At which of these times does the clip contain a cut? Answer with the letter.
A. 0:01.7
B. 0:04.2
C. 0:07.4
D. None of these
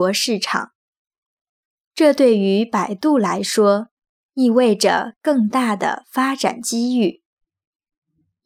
D